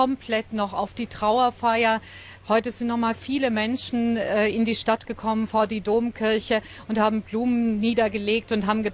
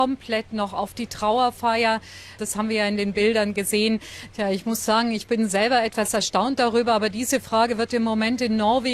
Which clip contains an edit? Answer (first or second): second